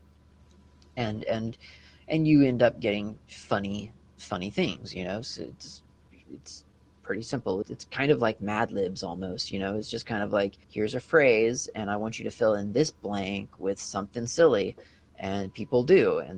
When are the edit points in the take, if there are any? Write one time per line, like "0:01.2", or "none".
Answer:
0:07.6
0:10.6